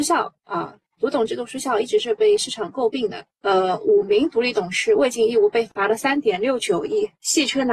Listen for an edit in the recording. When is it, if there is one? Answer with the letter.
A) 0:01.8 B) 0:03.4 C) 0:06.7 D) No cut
B